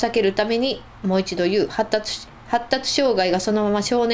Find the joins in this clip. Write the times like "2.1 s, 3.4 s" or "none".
2.3 s